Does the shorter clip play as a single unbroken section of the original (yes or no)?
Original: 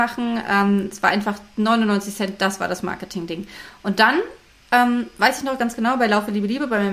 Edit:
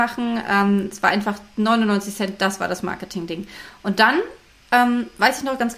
yes